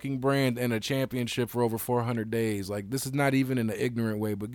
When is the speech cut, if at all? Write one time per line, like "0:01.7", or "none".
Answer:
none